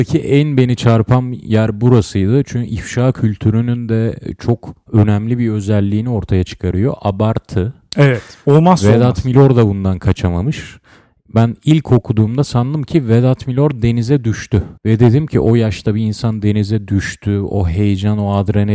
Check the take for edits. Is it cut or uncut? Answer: cut